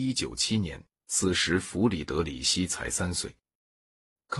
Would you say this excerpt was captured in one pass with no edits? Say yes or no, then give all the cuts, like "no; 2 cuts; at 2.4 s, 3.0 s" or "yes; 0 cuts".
yes; 0 cuts